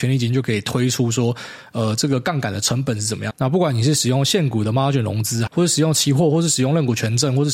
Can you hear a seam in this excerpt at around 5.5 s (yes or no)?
yes